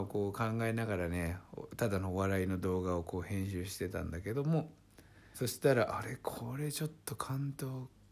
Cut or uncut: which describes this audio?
cut